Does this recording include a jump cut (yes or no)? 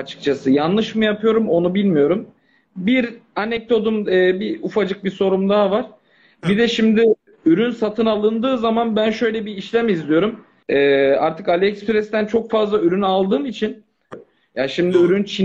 yes